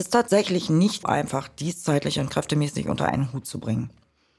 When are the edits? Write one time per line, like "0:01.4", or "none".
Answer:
0:01.0

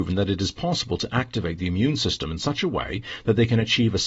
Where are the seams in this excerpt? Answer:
none

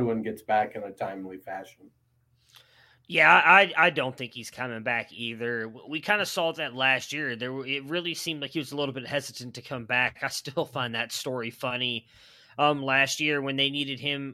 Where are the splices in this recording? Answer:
none

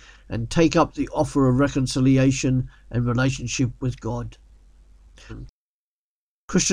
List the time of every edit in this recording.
0:05.3

